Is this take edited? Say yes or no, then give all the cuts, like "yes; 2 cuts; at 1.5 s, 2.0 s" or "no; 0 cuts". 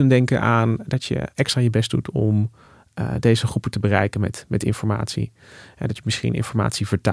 no; 0 cuts